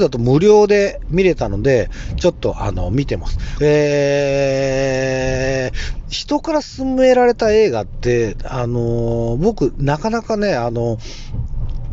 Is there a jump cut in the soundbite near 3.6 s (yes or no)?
yes